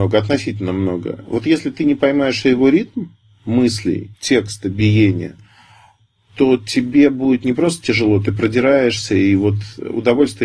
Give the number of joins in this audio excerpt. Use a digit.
1